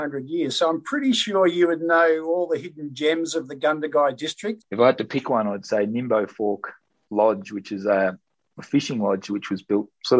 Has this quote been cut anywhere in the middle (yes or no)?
yes